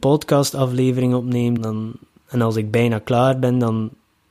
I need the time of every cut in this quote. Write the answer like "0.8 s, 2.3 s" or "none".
1.6 s